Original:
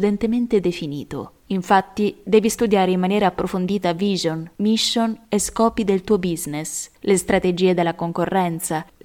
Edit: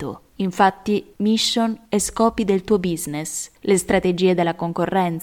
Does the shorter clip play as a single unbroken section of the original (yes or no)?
no